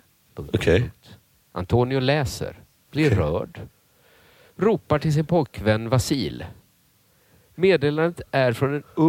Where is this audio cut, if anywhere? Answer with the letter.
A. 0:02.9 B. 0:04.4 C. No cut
A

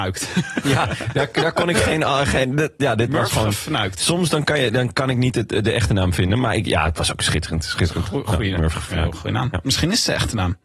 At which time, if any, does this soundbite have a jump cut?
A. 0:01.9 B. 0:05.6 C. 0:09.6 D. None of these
D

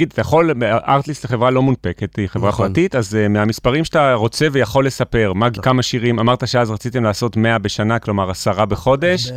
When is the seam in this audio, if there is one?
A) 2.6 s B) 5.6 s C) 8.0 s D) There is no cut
B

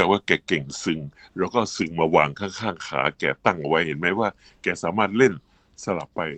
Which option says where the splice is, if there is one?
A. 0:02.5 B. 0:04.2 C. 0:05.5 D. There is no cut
D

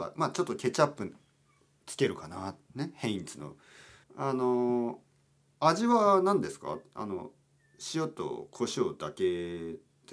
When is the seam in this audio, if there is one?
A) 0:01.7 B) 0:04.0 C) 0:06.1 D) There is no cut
B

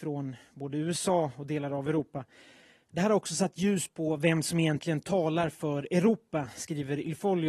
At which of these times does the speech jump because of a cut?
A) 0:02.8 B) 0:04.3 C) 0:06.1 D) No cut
A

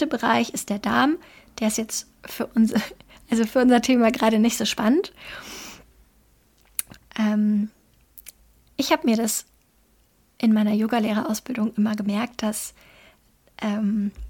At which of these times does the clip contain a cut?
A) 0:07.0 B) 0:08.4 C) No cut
A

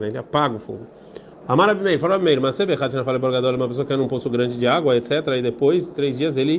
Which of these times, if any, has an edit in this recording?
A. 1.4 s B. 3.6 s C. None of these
A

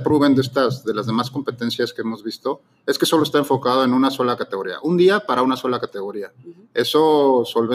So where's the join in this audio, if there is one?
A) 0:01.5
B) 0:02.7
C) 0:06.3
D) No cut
D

